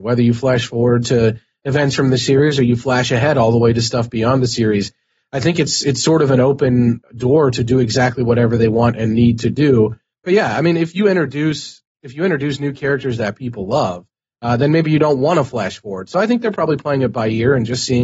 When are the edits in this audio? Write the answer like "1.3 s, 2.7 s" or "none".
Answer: none